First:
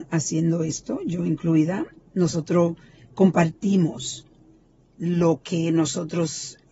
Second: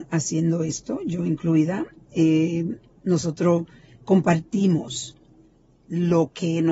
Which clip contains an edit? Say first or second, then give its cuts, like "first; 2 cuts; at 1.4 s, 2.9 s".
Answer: first; 1 cut; at 2.0 s